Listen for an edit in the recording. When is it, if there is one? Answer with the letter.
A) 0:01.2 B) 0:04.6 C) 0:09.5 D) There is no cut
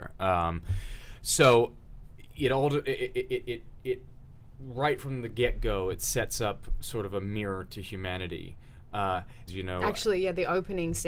C